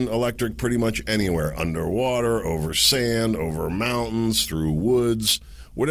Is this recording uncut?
yes; 0 cuts

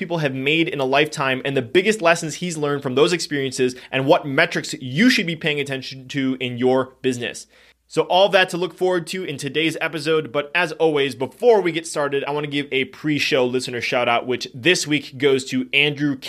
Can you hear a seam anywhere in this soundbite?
no; 0 cuts

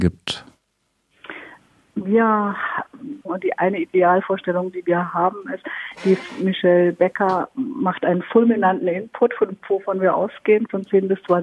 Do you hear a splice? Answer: yes; 1 cut; at 3.2 s

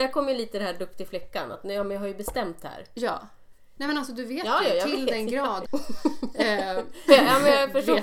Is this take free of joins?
no; 3 cuts; at 3.8 s, 5.7 s, 7.1 s

